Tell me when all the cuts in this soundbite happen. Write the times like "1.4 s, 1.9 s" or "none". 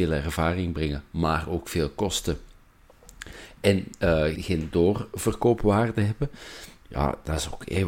4.4 s, 6.8 s